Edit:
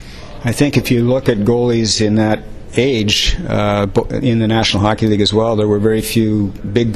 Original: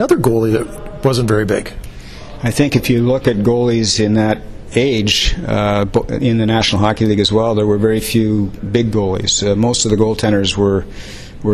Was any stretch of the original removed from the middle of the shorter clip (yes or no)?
no